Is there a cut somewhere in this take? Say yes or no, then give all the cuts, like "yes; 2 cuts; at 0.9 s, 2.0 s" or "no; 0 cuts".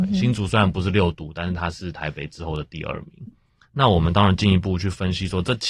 yes; 1 cut; at 3.3 s